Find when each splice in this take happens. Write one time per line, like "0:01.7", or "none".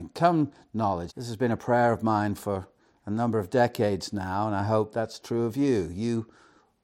0:01.1

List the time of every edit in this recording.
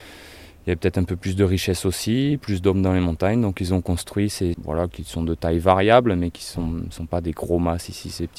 0:04.5

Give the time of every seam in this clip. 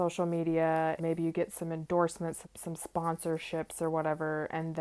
0:01.0
0:02.4

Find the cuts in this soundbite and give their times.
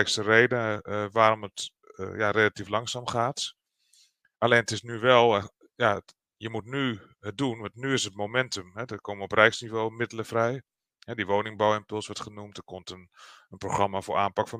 none

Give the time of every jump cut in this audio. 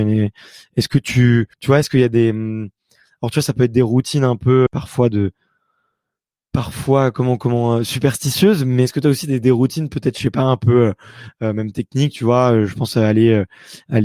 0:01.5
0:04.7

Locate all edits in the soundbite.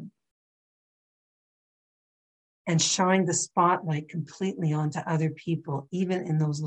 0:02.5

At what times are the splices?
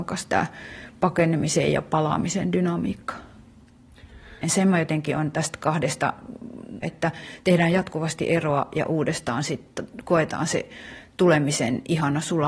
0:04.4
0:06.8

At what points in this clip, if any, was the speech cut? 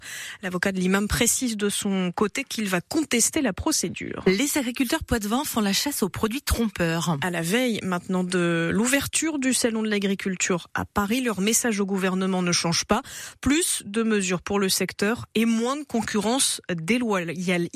none

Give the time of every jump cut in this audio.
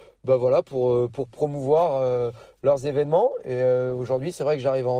none

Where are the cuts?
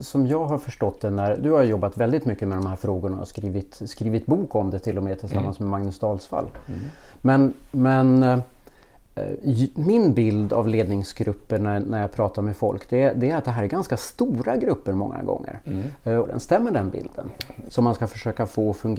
0:01.4
0:16.2
0:17.7

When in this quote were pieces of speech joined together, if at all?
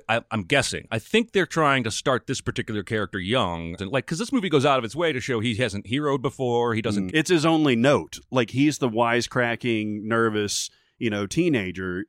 0:03.8
0:07.1

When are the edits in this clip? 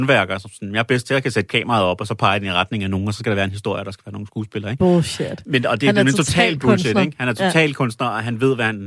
none

